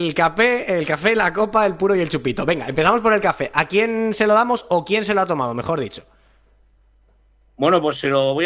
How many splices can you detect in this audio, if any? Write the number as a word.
zero